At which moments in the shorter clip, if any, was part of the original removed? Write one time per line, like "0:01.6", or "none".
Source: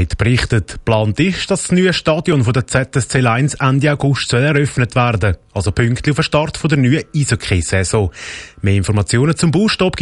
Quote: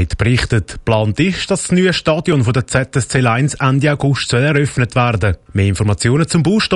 0:05.5